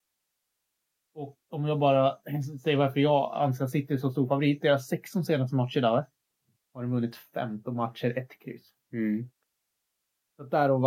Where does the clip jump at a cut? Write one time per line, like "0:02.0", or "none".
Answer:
0:01.4